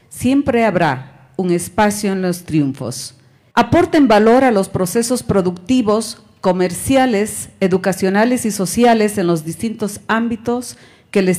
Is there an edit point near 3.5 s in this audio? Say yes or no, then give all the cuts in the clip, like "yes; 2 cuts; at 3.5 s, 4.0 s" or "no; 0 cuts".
yes; 1 cut; at 3.5 s